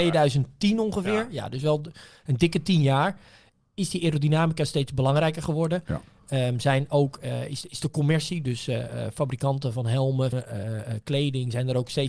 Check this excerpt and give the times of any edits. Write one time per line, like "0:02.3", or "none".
0:10.3